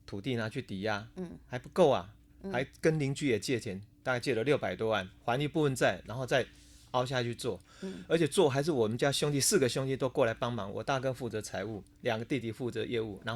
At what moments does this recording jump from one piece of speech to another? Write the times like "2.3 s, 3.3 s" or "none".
none